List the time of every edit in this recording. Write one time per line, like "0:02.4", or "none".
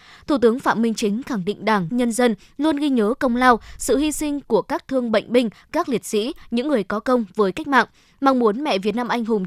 0:01.9